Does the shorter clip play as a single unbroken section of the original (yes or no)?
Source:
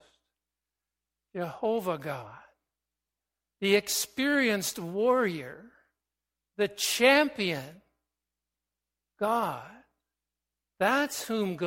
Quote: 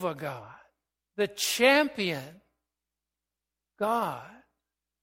no